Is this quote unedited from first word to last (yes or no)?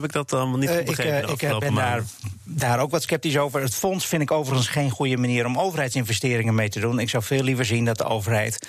yes